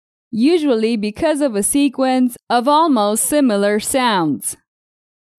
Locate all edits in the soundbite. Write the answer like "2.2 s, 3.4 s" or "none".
none